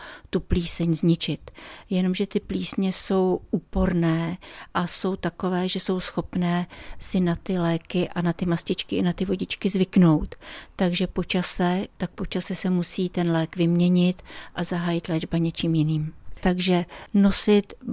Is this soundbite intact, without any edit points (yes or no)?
no